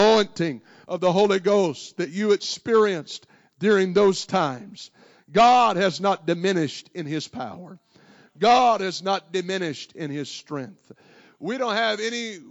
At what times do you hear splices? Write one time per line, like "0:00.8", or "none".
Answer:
none